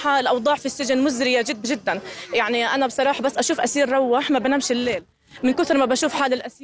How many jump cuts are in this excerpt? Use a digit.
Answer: 1